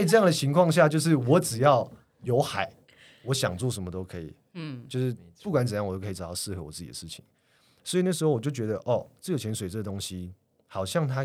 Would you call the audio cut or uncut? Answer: uncut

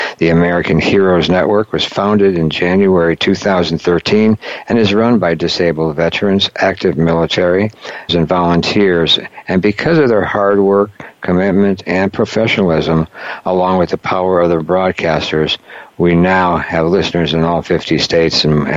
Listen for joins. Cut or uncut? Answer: cut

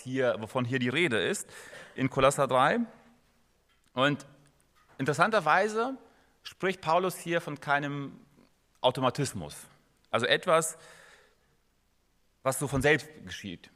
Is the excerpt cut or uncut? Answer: uncut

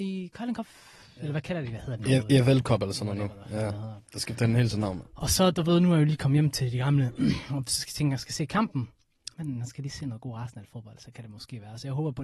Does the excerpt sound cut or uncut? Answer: cut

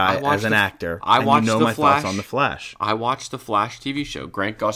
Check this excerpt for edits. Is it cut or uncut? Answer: uncut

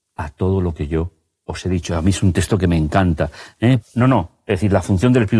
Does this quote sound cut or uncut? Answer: cut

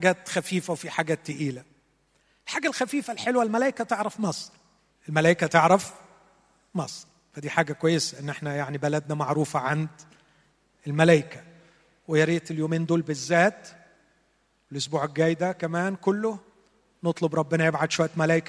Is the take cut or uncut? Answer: cut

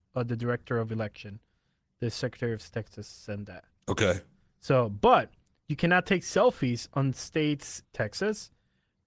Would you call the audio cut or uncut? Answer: cut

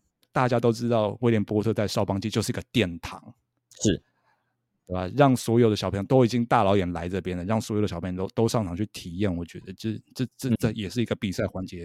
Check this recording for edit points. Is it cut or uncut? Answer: uncut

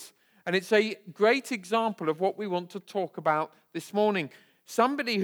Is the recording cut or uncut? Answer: uncut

